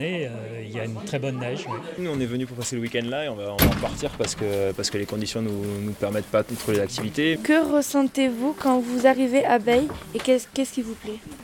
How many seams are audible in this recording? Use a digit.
2